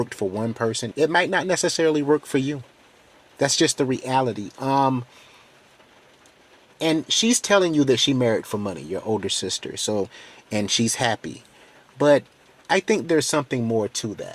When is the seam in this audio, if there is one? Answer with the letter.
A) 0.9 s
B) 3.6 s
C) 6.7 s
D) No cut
A